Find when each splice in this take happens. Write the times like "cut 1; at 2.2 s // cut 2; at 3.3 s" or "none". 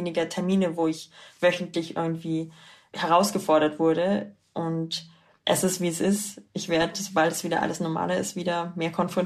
none

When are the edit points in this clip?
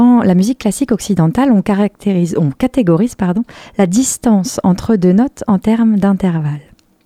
none

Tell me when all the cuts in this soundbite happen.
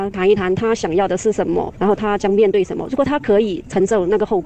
cut 1; at 1.7 s

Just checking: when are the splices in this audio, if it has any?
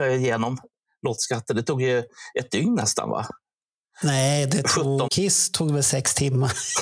cut 1; at 5.1 s

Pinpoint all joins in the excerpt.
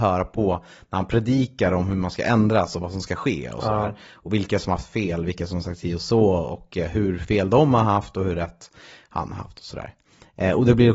none

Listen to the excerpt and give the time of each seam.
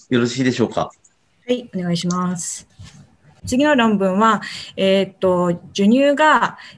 none

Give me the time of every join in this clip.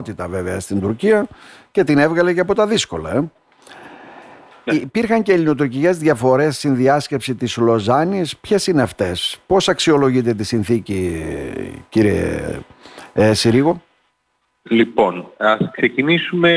cut 1; at 4.7 s

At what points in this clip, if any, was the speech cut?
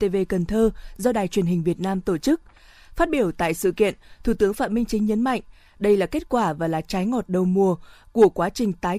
none

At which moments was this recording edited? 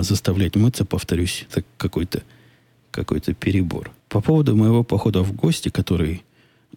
cut 1; at 1.5 s // cut 2; at 4.0 s

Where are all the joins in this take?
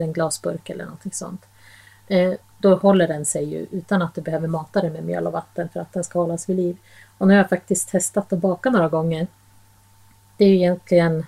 cut 1; at 2.4 s

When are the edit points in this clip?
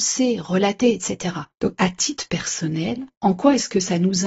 cut 1; at 1.5 s

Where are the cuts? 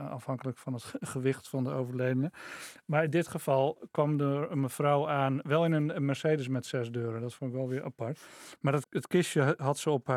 cut 1; at 8.8 s

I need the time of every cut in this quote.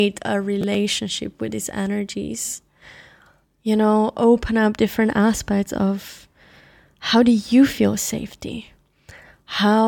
none

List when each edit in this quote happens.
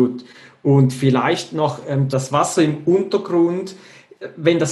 cut 1; at 2.1 s

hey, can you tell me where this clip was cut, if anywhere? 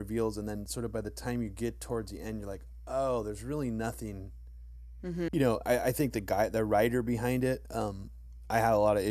cut 1; at 5.3 s

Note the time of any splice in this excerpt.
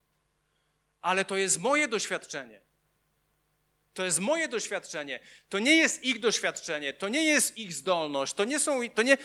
none

